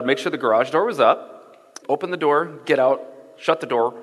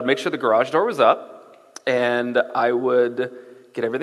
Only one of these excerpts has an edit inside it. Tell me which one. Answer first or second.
first